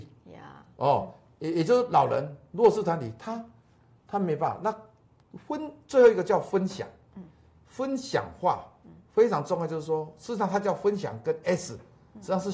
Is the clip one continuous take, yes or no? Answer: yes